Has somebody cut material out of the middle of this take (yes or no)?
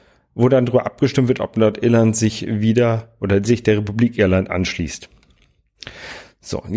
no